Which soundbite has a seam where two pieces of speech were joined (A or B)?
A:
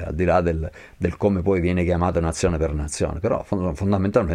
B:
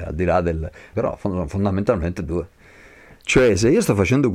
B